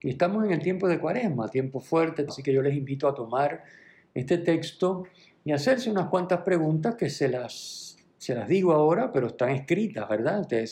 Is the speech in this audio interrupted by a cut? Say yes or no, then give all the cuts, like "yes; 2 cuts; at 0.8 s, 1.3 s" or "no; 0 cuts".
yes; 1 cut; at 2.3 s